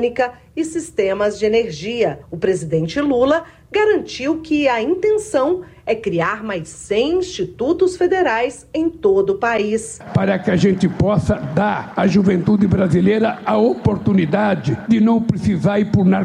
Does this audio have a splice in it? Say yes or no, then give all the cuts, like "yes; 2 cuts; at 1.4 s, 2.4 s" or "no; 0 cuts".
no; 0 cuts